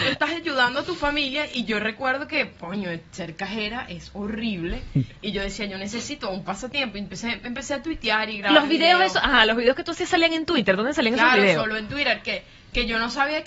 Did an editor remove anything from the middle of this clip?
no; 0 cuts

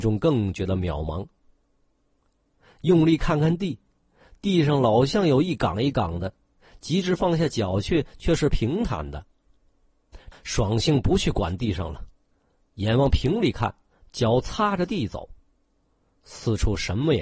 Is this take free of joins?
no; 1 cut; at 10.3 s

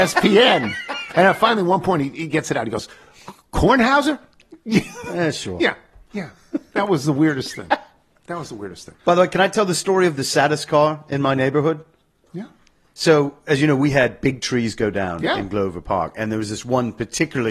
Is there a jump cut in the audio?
yes; 1 cut; at 3.4 s

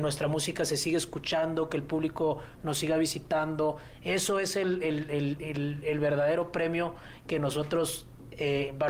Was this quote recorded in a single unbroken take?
yes; 0 cuts

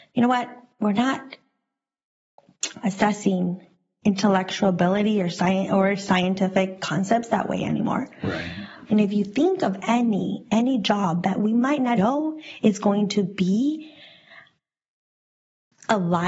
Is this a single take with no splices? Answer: no; 2 cuts; at 8.9 s, 12.0 s

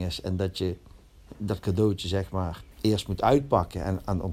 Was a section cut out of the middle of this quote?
yes; 1 cut; at 2.7 s

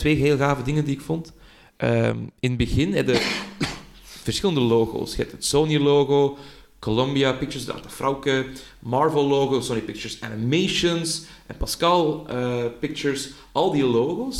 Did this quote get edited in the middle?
no; 0 cuts

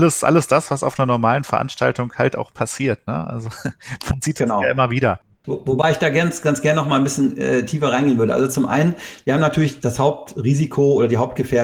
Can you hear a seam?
no; 0 cuts

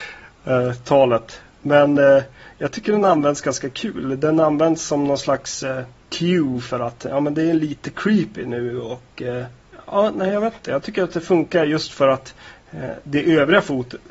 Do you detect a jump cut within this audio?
no; 0 cuts

